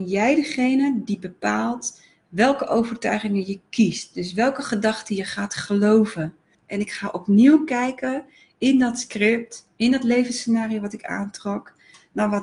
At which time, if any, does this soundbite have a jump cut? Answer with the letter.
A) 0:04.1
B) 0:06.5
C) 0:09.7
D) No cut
B